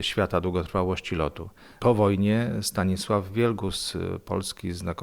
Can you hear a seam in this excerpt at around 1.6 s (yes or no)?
no